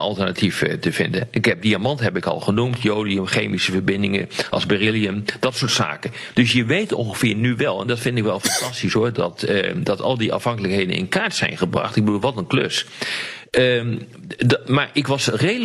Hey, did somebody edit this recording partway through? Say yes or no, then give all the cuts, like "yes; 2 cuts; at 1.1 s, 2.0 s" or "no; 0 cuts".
yes; 1 cut; at 6.3 s